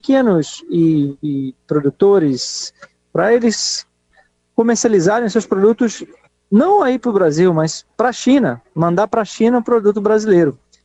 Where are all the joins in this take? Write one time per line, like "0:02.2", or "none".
none